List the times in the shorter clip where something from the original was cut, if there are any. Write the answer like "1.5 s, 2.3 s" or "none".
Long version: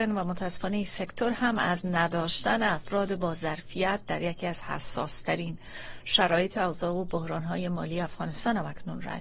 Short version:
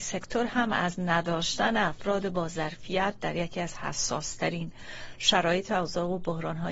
none